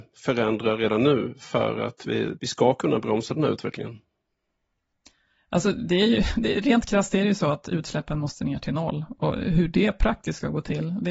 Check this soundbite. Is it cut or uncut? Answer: cut